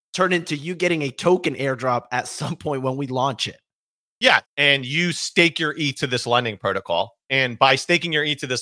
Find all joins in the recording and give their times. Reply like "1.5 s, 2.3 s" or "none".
4.4 s